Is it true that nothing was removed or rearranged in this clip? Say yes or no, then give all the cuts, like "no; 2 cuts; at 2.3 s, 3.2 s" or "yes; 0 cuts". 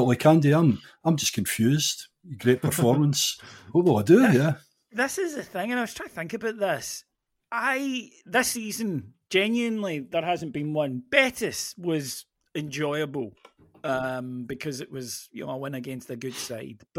yes; 0 cuts